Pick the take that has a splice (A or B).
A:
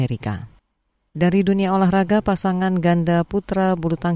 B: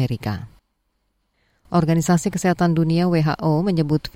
A